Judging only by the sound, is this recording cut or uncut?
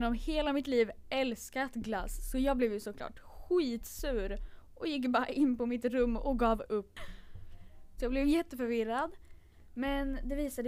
cut